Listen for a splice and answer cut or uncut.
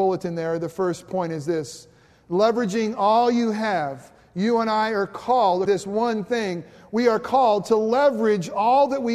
cut